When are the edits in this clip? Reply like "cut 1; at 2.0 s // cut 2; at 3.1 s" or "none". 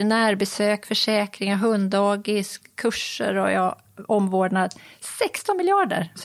none